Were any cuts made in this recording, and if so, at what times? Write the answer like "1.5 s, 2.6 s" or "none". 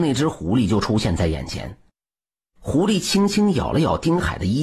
none

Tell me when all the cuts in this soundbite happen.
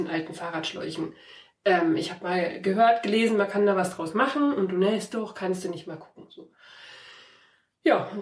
none

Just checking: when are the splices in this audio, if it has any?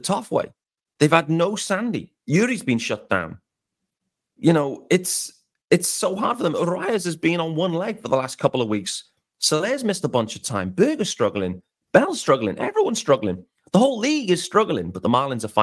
2.2 s

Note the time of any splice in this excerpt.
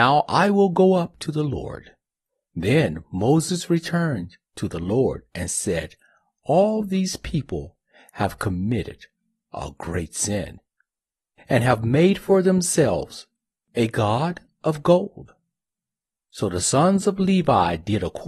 2.5 s, 16.1 s

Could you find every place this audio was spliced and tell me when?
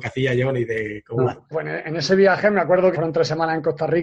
1.5 s, 2.9 s

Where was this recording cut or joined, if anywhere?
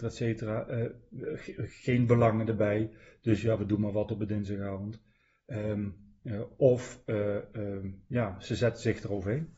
none

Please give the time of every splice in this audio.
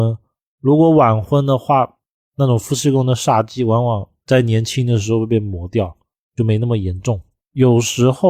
7.4 s

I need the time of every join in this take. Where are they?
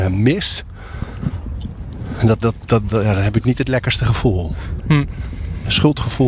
2.4 s, 4.8 s

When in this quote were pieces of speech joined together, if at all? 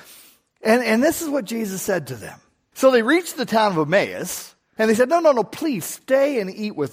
2.7 s, 4.8 s

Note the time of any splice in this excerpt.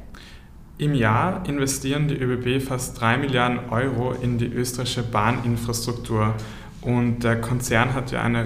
none

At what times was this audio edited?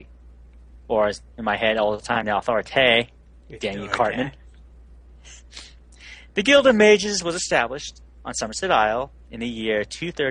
none

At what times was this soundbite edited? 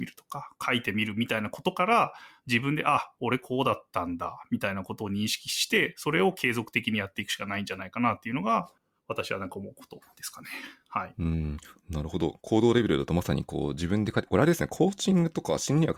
none

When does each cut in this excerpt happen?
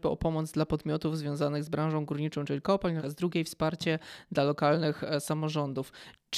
3.0 s

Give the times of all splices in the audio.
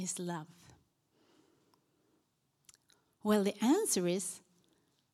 none

